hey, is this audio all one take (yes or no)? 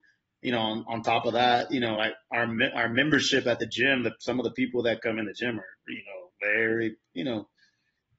yes